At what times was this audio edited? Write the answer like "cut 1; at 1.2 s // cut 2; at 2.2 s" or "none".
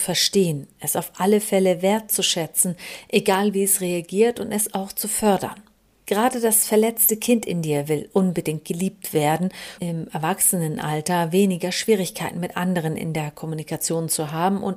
cut 1; at 9.8 s